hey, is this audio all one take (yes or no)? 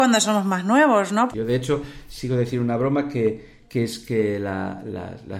no